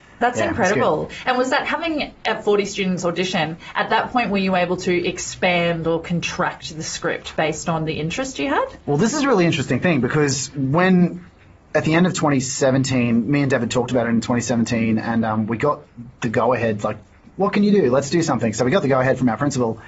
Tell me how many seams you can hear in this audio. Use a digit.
0